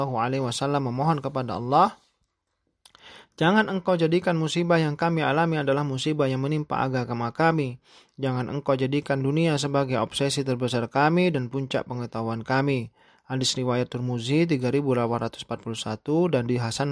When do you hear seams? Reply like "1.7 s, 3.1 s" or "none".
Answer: none